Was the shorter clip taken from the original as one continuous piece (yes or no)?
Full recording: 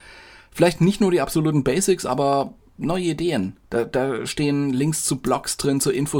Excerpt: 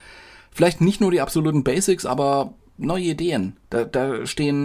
yes